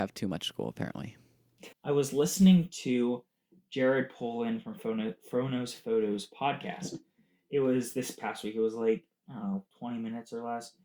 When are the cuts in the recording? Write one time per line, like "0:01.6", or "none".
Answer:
0:01.7